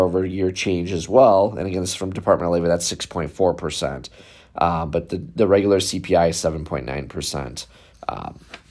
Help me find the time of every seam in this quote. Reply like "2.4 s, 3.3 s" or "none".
none